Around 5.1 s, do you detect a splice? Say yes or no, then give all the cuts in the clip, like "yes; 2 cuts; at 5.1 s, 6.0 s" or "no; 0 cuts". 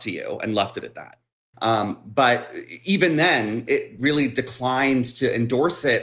no; 2 cuts; at 1.5 s, 3.7 s